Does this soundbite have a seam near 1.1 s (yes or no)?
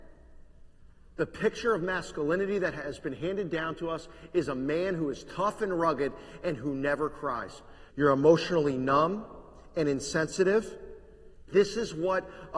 no